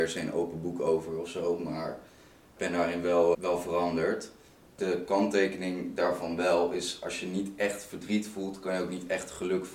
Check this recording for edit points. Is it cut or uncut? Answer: cut